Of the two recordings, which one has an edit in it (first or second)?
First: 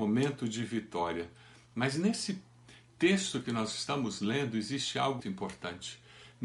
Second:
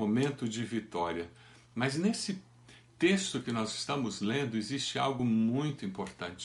first